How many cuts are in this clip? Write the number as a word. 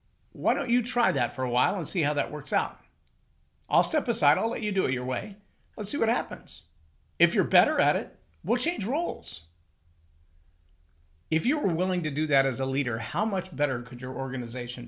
one